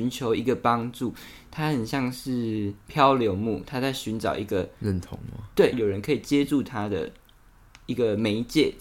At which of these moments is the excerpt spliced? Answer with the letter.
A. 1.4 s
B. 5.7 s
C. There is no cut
B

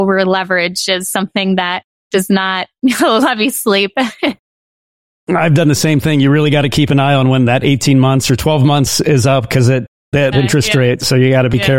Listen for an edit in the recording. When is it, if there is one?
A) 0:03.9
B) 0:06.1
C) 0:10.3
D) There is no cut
C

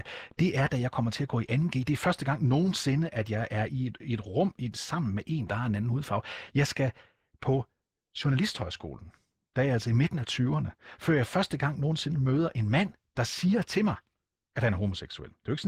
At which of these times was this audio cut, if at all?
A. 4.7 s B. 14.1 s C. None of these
C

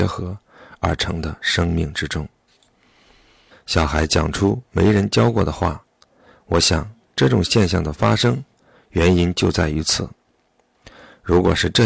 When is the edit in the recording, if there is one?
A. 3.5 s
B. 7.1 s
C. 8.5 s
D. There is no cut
A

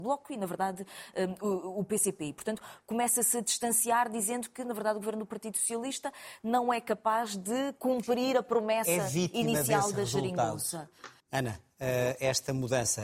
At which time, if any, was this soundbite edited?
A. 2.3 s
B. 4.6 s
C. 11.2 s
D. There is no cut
C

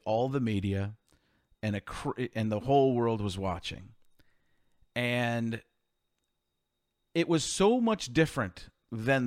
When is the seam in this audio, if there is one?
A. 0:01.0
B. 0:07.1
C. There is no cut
C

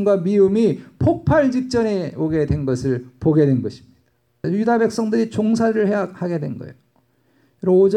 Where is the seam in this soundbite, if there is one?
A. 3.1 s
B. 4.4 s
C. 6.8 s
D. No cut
B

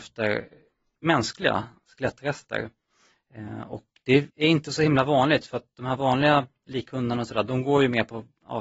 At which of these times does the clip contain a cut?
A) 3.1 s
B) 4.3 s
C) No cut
B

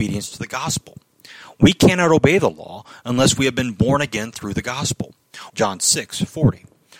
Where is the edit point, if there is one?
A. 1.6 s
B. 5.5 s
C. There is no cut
B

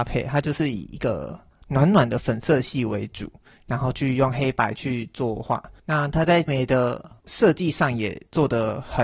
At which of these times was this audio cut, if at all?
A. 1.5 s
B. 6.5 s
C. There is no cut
B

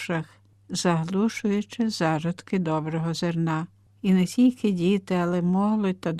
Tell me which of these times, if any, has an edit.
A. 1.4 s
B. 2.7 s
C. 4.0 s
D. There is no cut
C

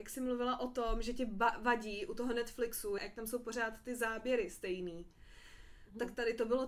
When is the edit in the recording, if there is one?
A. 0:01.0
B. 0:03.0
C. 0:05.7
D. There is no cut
B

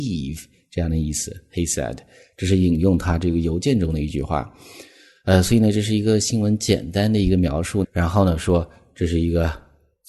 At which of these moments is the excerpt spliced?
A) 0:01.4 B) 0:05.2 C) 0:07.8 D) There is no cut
C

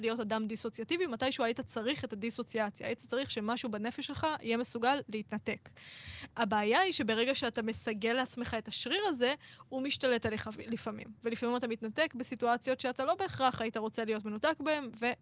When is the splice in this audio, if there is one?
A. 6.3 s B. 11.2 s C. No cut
C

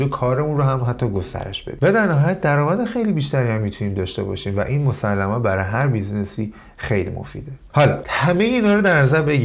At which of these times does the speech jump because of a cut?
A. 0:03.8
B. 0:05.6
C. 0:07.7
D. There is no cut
C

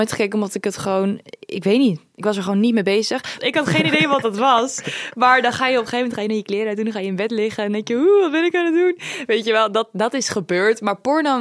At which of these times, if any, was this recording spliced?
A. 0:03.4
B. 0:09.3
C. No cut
A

